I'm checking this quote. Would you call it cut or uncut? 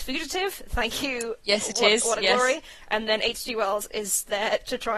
uncut